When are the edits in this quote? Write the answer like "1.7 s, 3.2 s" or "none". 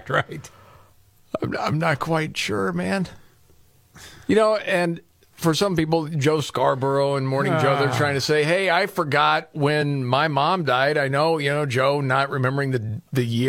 none